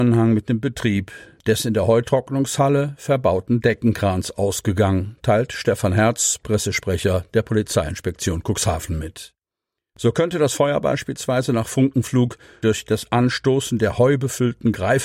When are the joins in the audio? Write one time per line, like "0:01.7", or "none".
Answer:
none